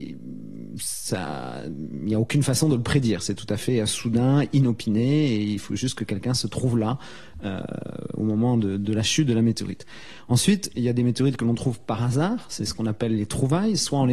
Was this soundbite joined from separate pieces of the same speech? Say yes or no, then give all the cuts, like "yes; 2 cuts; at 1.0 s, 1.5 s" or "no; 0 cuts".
no; 0 cuts